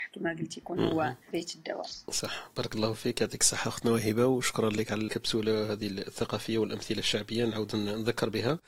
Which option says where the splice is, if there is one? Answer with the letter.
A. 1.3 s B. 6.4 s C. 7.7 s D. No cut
A